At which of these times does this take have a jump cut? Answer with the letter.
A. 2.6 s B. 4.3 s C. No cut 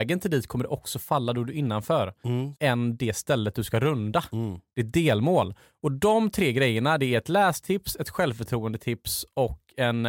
A